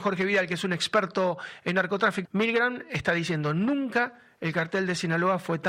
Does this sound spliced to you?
yes; 1 cut; at 2.2 s

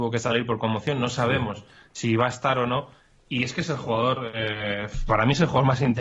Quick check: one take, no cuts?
yes; 0 cuts

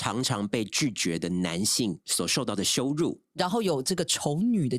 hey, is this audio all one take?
yes; 0 cuts

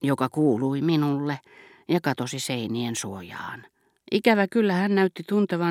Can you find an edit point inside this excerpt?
yes; 1 cut; at 4.0 s

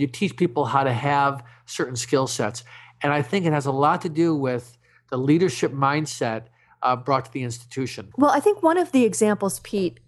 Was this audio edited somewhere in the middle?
yes; 1 cut; at 8.1 s

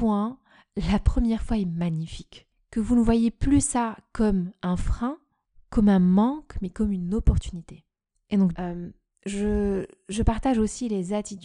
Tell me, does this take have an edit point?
yes; 1 cut; at 8.5 s

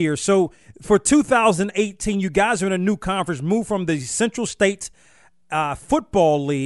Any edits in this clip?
no; 0 cuts

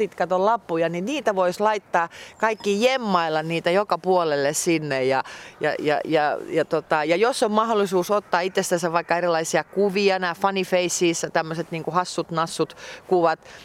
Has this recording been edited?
no; 0 cuts

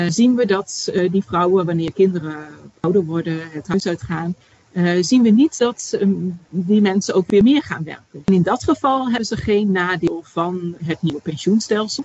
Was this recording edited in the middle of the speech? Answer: yes; 2 cuts; at 8.2 s, 10.8 s

